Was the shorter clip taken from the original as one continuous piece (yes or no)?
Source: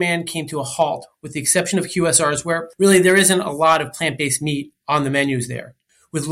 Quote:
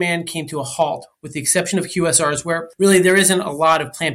yes